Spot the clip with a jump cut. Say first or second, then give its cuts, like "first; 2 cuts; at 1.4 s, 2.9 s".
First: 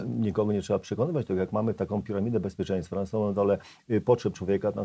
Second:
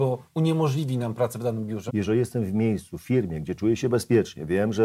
second; 1 cut; at 1.9 s